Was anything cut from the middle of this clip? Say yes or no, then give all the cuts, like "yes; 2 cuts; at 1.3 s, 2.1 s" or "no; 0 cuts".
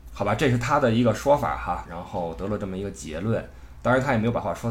yes; 1 cut; at 1.9 s